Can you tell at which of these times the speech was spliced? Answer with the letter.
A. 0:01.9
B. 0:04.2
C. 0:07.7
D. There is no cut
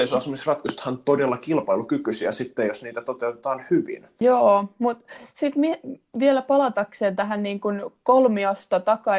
B